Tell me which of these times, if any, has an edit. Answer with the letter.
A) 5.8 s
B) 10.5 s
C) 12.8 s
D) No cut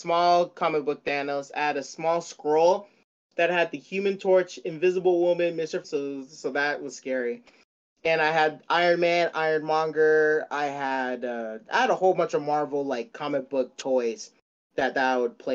A